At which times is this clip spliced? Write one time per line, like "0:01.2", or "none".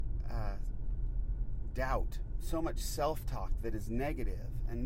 none

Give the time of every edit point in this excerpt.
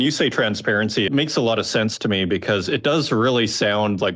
0:01.1

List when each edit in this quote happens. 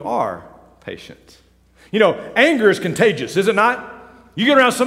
none

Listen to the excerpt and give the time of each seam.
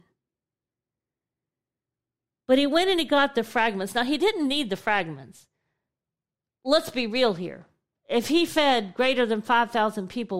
none

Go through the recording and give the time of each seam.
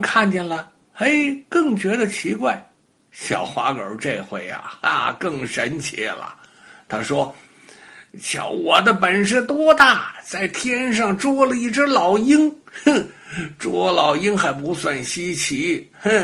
none

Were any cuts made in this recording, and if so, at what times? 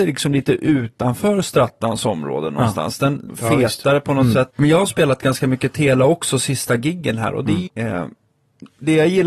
0:03.3
0:04.5
0:07.7

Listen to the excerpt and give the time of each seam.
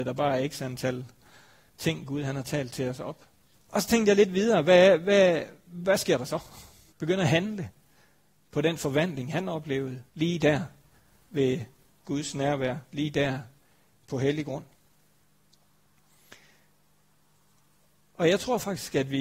0:03.5
0:06.9
0:10.1

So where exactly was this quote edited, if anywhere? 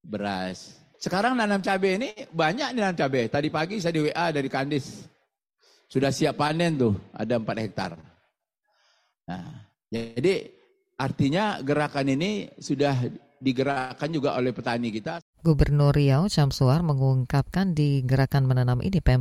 0:00.9

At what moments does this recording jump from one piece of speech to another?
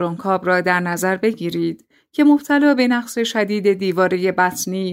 none

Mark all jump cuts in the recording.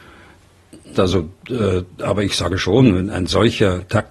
0:00.9
0:03.1

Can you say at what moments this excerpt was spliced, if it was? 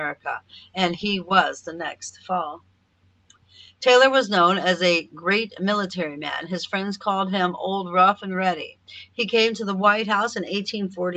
none

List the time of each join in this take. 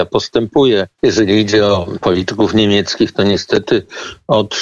0:01.0

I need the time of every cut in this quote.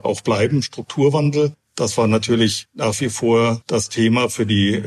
none

